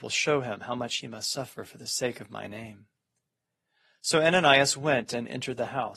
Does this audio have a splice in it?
no; 0 cuts

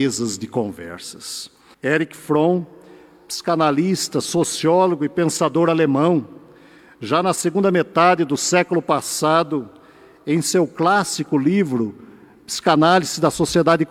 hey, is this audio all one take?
no; 1 cut; at 1.7 s

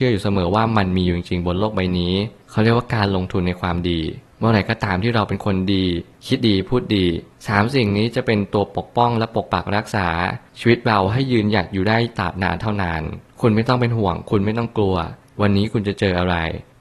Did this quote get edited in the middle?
yes; 1 cut; at 6.4 s

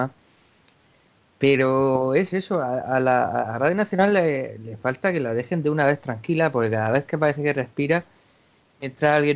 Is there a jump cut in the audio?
no; 0 cuts

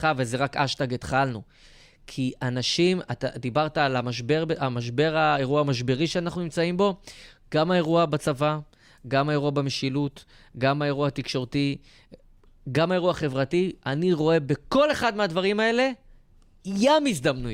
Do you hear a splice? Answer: no; 0 cuts

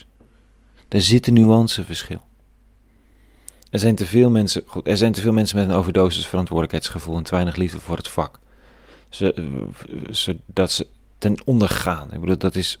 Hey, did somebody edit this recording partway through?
no; 0 cuts

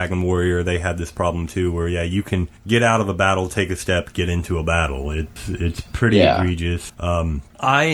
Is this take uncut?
yes; 0 cuts

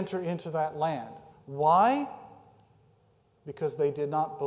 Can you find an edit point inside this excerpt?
yes; 1 cut; at 1.3 s

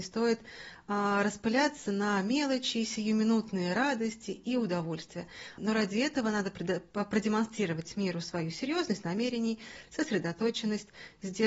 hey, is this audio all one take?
no; 1 cut; at 5.6 s

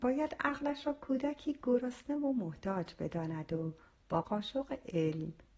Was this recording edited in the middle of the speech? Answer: yes; 1 cut; at 4.2 s

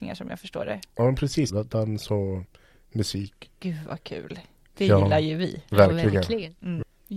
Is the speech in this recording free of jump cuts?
no; 1 cut; at 1.5 s

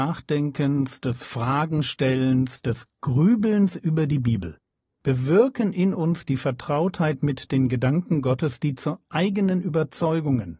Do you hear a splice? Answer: no; 0 cuts

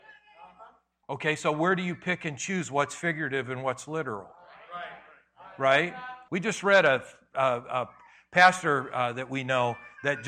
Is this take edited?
yes; 2 cuts; at 1.0 s, 6.3 s

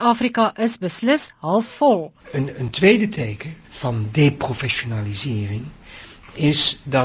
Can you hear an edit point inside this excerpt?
yes; 2 cuts; at 2.2 s, 3.6 s

